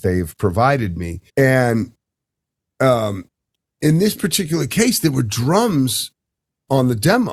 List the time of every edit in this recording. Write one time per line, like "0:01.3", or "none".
0:01.3